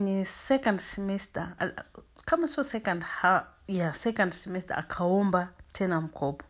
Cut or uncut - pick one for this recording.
cut